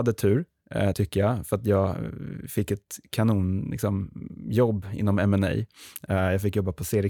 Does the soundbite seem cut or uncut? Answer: uncut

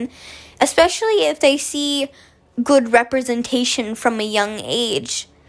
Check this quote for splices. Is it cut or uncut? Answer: uncut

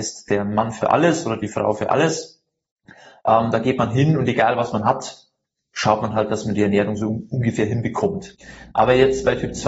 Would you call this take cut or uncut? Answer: uncut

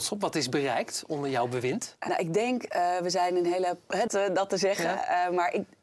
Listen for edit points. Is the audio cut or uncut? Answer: cut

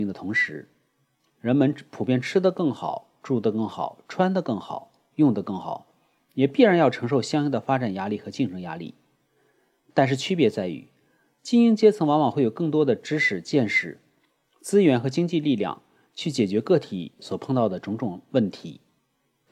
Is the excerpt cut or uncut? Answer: uncut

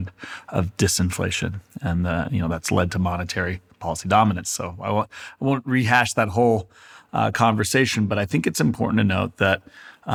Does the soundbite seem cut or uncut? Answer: uncut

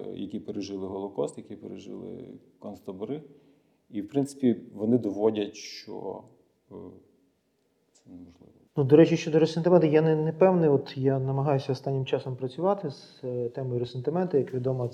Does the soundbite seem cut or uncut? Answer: cut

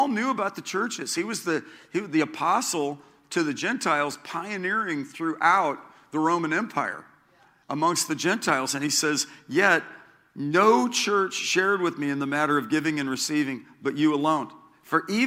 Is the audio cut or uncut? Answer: uncut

